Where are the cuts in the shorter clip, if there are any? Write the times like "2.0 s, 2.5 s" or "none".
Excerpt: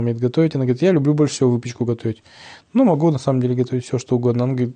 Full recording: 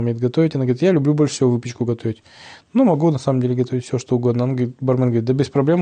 none